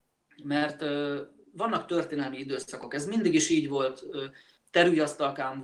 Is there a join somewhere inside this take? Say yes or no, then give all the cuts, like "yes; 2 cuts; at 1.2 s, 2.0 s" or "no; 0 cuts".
yes; 1 cut; at 4.6 s